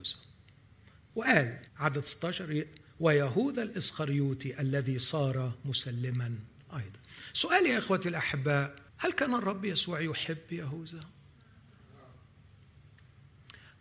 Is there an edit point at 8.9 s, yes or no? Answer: yes